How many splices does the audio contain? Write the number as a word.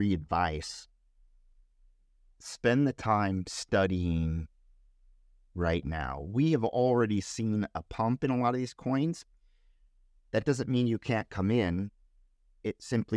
zero